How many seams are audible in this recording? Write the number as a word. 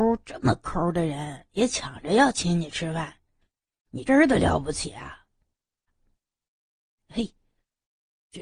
two